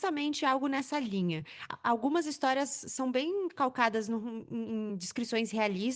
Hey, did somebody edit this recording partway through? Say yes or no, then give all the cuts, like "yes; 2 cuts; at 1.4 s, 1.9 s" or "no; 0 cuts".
no; 0 cuts